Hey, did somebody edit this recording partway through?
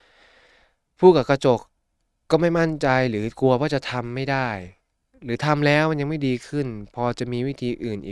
no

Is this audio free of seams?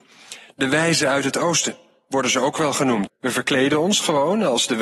no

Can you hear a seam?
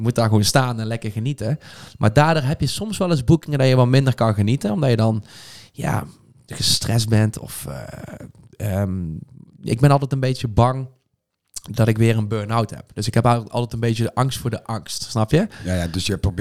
no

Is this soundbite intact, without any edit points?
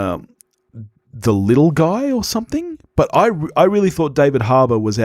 yes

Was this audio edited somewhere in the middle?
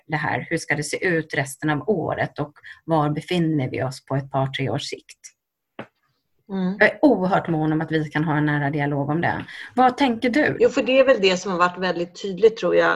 yes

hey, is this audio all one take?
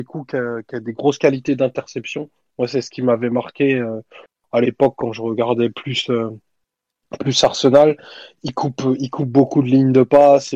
yes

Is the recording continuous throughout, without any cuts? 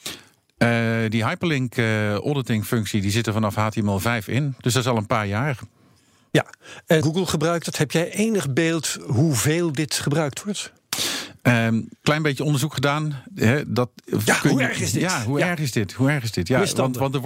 no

